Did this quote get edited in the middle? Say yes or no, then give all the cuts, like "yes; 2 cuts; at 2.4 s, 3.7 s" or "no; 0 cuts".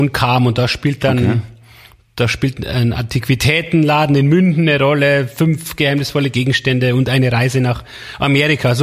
no; 0 cuts